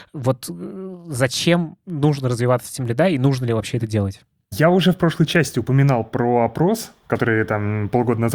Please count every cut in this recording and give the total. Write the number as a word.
zero